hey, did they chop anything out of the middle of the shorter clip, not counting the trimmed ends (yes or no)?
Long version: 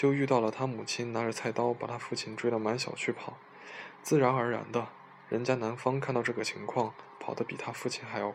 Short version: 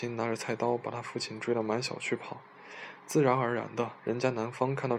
yes